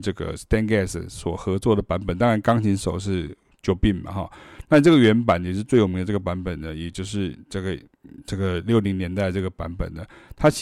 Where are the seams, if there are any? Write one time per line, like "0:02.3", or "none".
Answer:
none